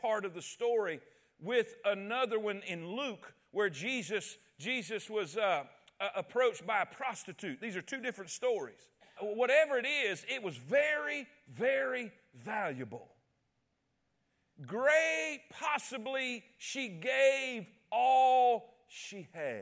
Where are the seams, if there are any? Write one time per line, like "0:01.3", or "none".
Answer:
0:09.2